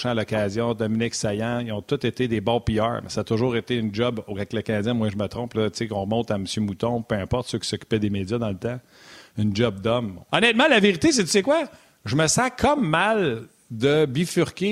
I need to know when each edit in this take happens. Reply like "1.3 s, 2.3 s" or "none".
10.3 s